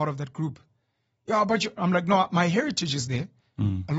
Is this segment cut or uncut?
uncut